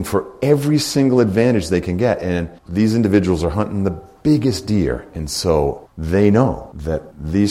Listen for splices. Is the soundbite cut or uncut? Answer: cut